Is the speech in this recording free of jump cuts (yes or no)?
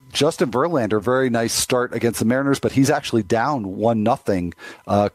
yes